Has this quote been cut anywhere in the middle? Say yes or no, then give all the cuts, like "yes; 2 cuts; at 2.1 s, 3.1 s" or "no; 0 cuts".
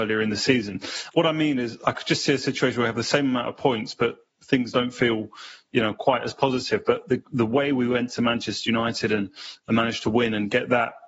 no; 0 cuts